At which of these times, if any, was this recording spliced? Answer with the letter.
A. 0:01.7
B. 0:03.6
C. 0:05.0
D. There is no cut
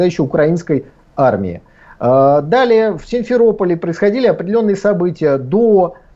D